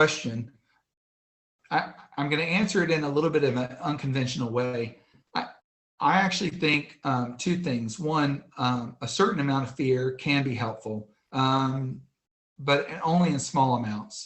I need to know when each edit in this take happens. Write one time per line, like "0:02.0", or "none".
none